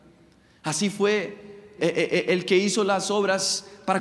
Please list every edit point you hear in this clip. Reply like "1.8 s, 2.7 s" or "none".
1.8 s